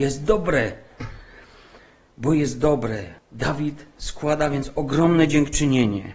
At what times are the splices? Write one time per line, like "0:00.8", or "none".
0:03.2